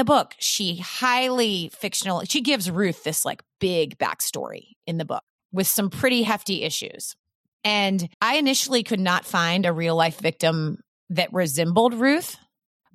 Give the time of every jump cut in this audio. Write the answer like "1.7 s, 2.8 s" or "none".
8.1 s